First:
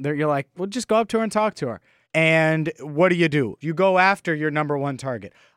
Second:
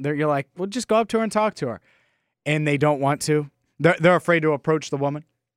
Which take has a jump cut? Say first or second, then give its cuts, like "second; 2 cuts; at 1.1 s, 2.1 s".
first; 2 cuts; at 2.0 s, 3.6 s